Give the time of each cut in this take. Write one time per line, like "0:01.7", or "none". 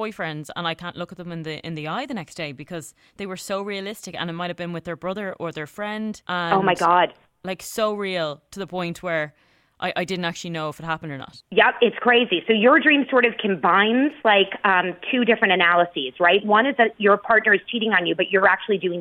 none